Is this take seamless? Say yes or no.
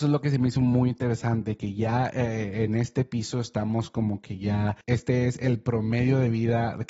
yes